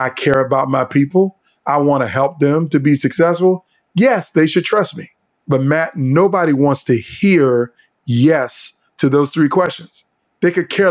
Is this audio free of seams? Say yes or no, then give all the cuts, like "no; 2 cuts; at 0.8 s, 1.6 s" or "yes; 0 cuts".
yes; 0 cuts